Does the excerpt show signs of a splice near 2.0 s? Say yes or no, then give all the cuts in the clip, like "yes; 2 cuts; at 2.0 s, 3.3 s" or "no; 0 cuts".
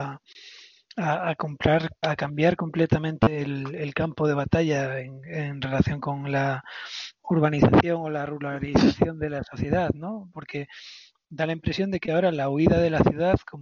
yes; 1 cut; at 2.0 s